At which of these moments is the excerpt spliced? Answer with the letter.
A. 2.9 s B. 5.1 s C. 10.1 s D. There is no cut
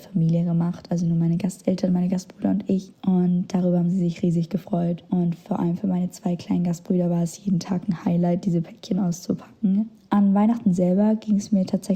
A